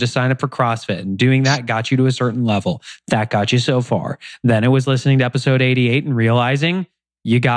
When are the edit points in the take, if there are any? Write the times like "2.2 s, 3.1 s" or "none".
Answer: none